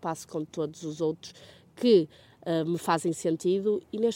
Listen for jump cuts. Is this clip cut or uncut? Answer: uncut